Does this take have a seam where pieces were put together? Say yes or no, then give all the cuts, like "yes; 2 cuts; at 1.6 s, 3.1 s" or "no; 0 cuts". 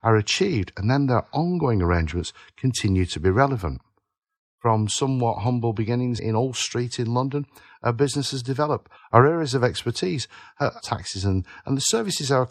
yes; 3 cuts; at 6.2 s, 9.0 s, 10.8 s